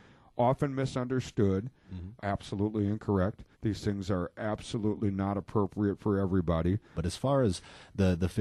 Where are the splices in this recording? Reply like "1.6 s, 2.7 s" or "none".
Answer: 2.2 s, 3.5 s, 6.9 s